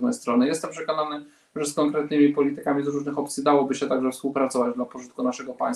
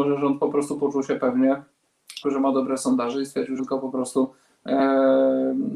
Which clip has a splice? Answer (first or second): second